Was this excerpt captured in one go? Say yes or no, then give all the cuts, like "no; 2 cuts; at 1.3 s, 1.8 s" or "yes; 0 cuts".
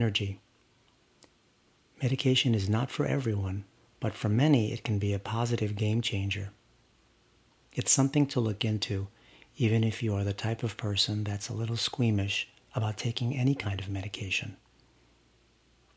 yes; 0 cuts